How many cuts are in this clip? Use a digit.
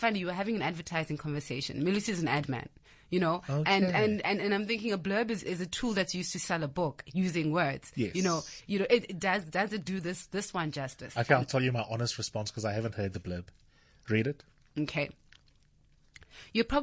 0